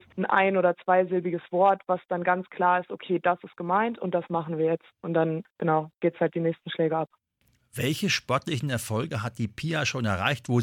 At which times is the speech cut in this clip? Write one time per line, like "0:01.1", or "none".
none